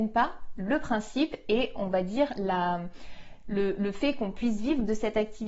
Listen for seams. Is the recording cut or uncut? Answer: uncut